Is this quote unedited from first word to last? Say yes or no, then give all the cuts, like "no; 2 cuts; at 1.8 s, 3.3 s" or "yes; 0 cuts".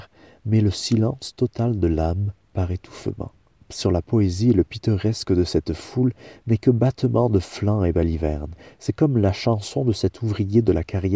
no; 1 cut; at 3.6 s